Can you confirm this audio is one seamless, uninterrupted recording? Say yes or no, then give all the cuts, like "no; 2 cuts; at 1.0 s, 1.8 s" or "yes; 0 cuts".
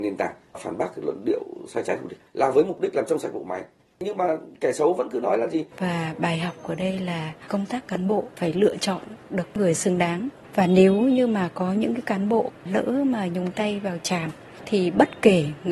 no; 1 cut; at 5.7 s